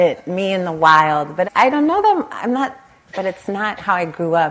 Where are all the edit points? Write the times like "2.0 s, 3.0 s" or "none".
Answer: 1.4 s, 3.1 s